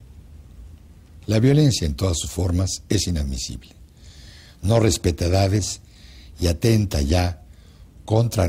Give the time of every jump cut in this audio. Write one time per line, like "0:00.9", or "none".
none